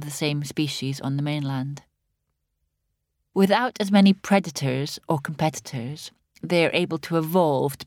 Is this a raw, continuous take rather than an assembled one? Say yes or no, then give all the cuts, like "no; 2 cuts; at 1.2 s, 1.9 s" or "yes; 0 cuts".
yes; 0 cuts